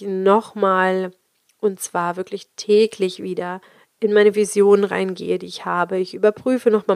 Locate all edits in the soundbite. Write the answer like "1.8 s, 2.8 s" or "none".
none